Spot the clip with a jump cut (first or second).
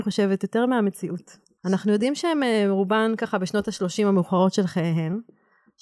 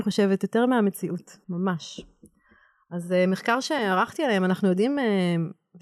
second